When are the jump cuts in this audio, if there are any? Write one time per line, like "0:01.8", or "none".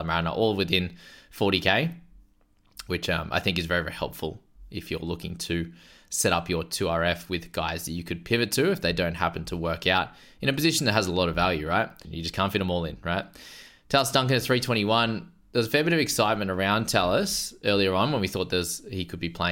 0:12.0